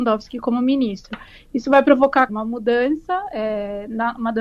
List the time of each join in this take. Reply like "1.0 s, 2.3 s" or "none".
2.3 s